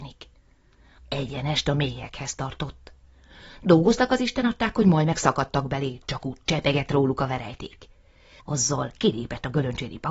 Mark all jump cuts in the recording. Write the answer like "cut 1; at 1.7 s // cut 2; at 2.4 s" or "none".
cut 1; at 1.0 s // cut 2; at 8.4 s

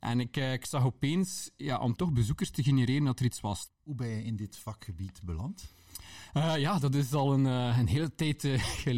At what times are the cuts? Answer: cut 1; at 3.7 s

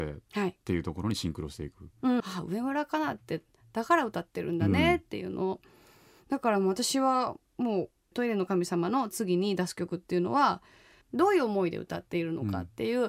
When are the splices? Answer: cut 1; at 2.2 s // cut 2; at 11.0 s

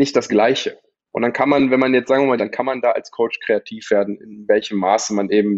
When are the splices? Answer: cut 1; at 0.9 s // cut 2; at 2.4 s // cut 3; at 4.2 s

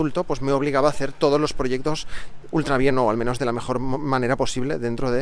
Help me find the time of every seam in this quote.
none

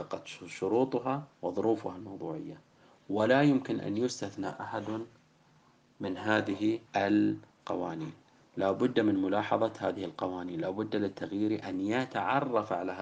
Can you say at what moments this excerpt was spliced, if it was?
cut 1; at 1.3 s // cut 2; at 6.9 s

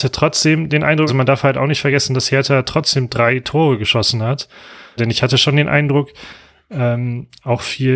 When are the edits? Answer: cut 1; at 1.1 s // cut 2; at 5.0 s

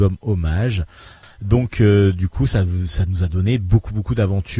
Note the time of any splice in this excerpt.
cut 1; at 1.2 s

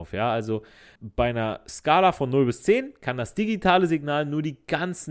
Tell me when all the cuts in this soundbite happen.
cut 1; at 1.0 s

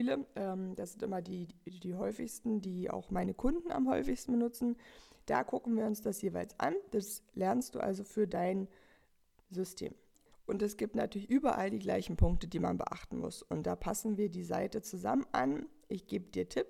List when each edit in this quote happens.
none

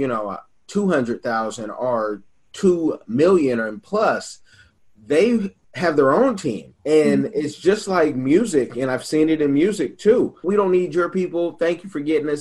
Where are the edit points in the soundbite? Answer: cut 1; at 6.8 s // cut 2; at 10.4 s

